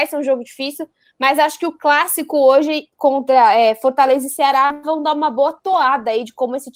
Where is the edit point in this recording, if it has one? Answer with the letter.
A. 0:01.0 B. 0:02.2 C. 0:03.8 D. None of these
D